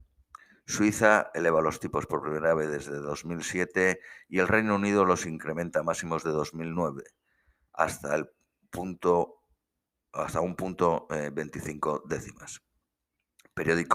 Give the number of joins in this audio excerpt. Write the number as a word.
zero